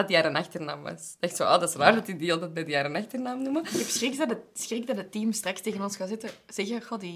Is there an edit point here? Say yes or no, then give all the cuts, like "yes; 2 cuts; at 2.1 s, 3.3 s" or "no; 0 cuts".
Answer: no; 0 cuts